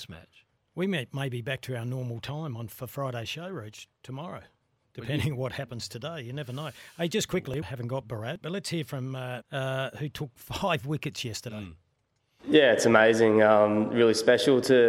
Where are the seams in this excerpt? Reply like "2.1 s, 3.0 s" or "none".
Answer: 7.6 s, 9.4 s